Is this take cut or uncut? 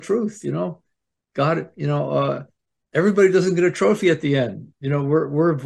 uncut